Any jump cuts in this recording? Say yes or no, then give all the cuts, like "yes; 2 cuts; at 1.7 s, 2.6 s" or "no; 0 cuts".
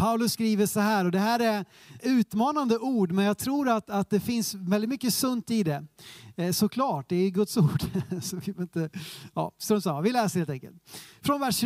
yes; 1 cut; at 2.0 s